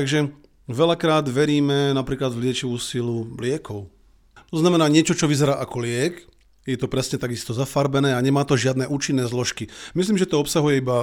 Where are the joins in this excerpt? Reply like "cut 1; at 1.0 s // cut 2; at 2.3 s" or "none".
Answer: cut 1; at 4.4 s